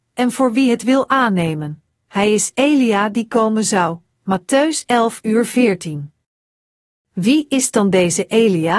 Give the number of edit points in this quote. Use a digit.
0